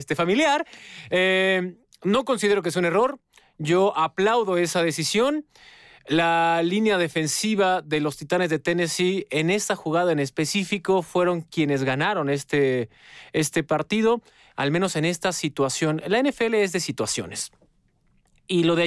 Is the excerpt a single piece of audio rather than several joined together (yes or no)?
yes